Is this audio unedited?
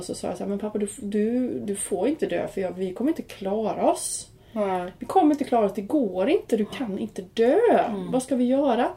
yes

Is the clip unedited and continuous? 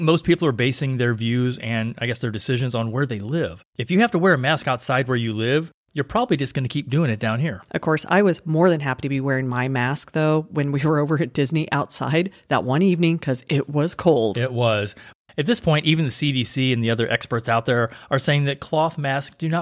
yes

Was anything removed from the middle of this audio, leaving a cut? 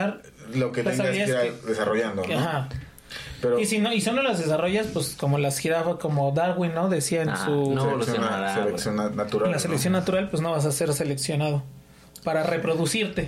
no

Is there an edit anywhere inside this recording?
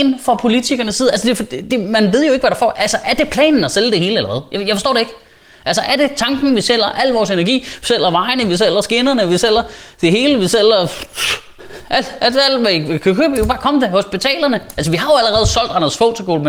yes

